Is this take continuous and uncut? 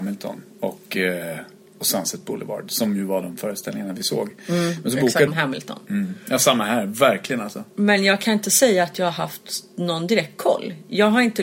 no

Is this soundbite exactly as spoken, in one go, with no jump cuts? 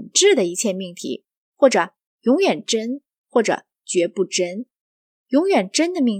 yes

